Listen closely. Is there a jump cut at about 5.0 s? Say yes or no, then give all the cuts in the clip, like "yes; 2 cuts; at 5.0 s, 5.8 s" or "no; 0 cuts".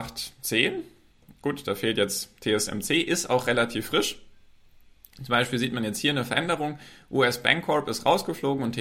no; 0 cuts